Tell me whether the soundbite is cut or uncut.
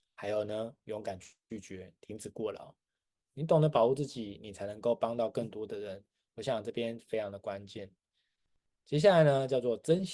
cut